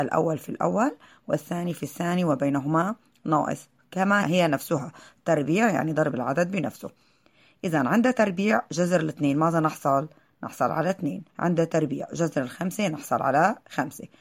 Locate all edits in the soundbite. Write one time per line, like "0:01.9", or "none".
0:04.2
0:11.3